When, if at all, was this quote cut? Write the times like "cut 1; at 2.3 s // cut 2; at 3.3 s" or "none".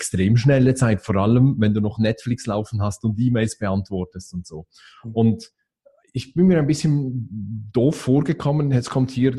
cut 1; at 5.0 s